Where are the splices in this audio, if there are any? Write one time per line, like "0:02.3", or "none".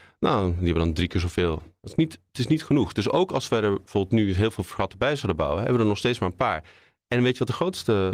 none